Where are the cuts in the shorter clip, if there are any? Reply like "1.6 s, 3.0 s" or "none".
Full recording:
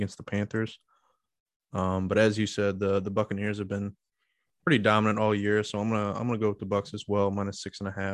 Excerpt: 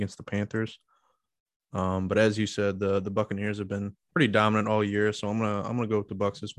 4.0 s